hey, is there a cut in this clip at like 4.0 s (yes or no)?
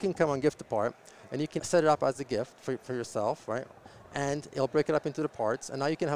no